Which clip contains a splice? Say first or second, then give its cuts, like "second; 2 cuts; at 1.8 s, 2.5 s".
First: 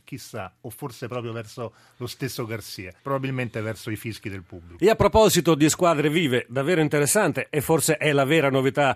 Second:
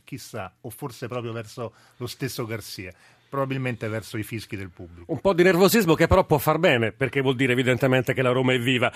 first; 2 cuts; at 3.0 s, 4.8 s